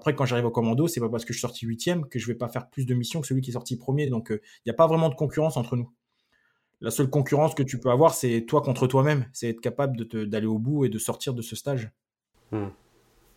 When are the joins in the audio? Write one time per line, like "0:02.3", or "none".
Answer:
none